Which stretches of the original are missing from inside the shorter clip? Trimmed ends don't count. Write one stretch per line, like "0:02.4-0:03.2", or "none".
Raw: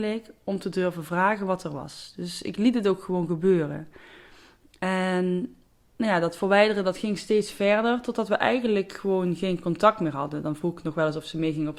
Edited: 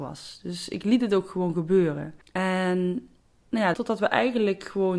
0:03.9-0:04.7
0:06.2-0:08.0